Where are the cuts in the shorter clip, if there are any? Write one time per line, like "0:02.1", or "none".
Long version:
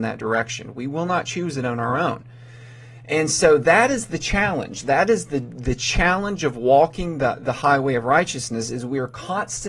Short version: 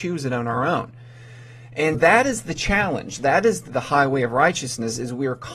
0:01.9
0:03.7